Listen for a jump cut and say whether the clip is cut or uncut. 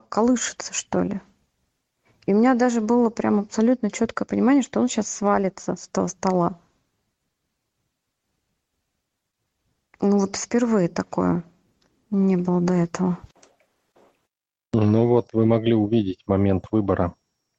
uncut